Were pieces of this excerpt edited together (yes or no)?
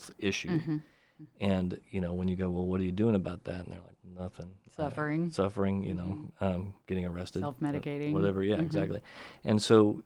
yes